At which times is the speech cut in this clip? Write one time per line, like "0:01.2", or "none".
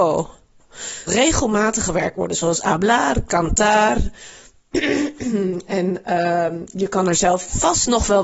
0:01.1

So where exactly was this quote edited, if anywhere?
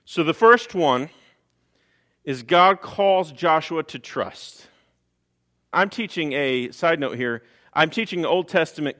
0:05.7

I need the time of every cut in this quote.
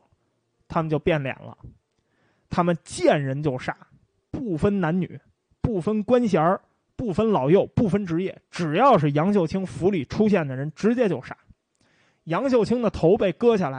none

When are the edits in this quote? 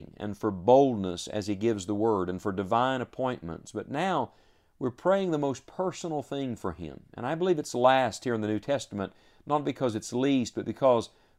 none

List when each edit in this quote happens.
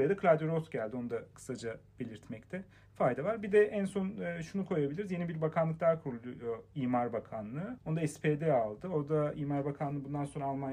none

